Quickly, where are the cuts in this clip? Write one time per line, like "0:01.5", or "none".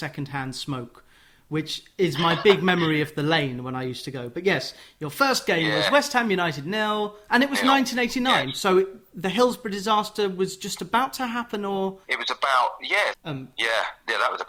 0:07.3
0:12.0
0:13.1